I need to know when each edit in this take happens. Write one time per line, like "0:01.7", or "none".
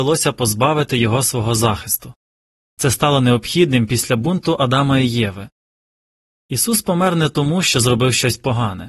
0:02.6

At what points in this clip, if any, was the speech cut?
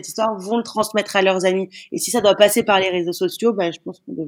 none

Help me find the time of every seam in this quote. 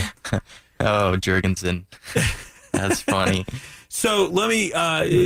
none

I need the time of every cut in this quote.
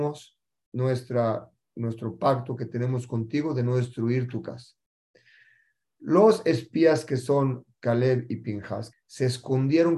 0:08.9

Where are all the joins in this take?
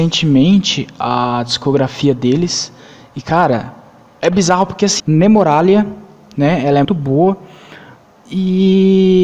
0:05.0
0:06.8

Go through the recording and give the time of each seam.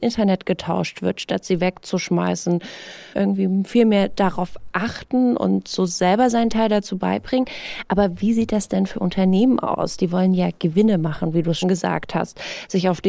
0:03.1
0:11.6

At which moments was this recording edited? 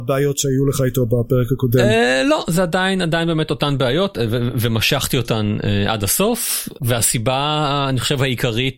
none

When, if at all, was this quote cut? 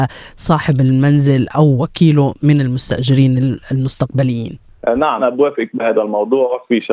0:05.2

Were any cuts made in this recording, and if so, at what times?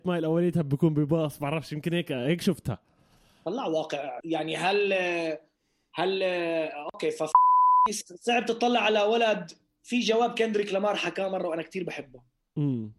0:04.2
0:08.0

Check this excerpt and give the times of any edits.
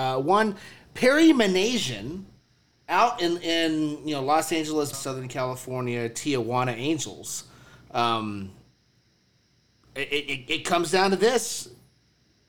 0:04.9

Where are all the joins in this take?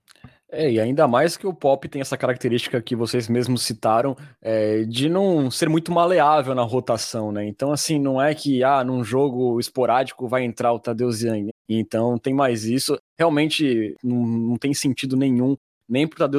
0:11.5

